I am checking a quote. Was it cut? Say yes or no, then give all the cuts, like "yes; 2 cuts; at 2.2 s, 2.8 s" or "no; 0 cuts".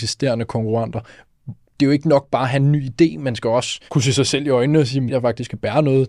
yes; 2 cuts; at 3.9 s, 5.1 s